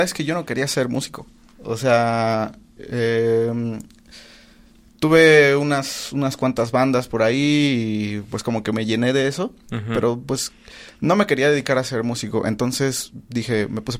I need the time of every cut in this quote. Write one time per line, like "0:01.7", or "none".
none